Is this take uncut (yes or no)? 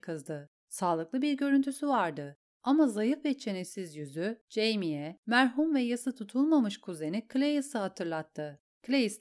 yes